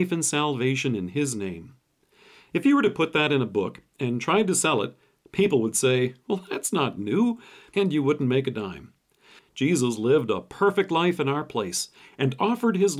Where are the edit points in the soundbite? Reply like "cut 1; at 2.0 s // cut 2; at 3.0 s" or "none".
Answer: cut 1; at 7.7 s // cut 2; at 9.4 s